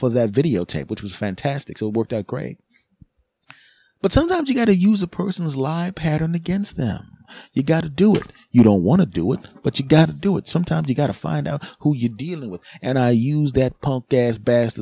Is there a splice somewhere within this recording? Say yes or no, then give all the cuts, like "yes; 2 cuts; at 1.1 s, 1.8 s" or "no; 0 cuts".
no; 0 cuts